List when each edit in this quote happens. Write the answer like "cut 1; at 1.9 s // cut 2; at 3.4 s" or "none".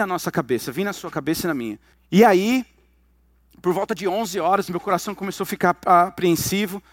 cut 1; at 1.9 s